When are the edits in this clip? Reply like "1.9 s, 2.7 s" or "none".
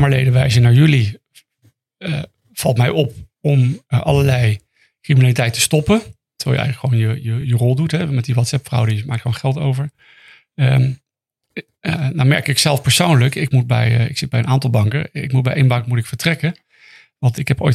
none